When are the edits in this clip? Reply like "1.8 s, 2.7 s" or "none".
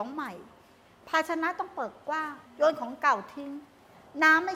2.5 s